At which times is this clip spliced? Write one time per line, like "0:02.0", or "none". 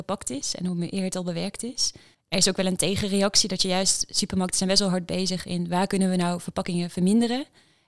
0:02.1